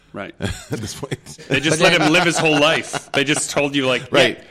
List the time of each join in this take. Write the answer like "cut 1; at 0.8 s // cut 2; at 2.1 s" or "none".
cut 1; at 1.4 s